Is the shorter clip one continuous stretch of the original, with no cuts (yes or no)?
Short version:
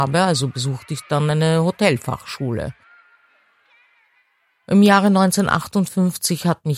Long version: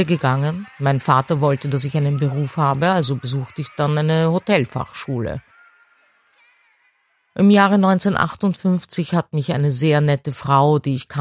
yes